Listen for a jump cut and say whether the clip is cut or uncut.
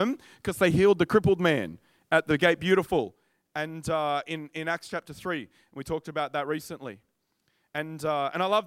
uncut